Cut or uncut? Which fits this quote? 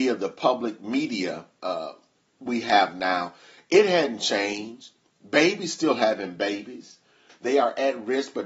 cut